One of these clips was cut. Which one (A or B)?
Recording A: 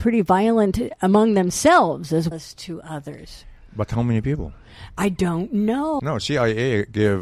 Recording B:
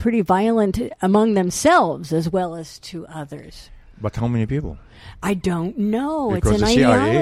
A